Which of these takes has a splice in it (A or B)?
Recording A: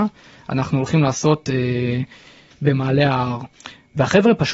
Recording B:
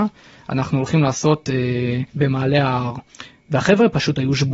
B